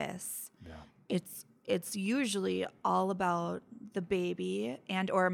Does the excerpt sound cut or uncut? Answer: uncut